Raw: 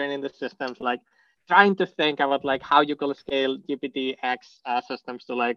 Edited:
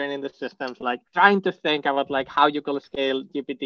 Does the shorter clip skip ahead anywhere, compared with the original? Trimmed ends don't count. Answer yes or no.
yes